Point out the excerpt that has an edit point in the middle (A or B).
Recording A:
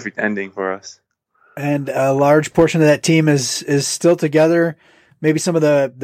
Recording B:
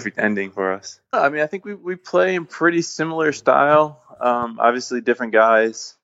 B